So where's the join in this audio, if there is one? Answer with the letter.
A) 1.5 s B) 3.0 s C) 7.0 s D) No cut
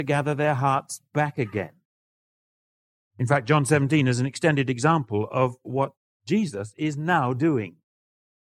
B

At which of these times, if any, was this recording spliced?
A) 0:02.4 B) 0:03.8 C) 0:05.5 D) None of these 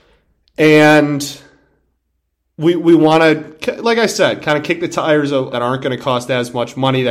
C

